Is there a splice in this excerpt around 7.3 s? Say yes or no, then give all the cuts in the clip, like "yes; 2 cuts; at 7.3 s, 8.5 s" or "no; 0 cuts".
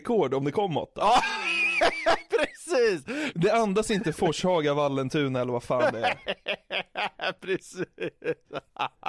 no; 1 cut; at 3.3 s